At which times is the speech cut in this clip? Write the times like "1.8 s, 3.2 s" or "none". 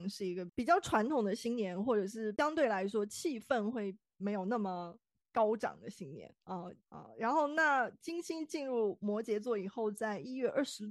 6.8 s